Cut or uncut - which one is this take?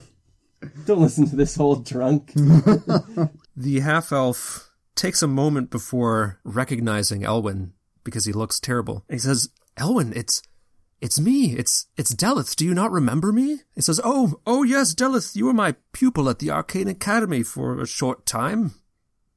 uncut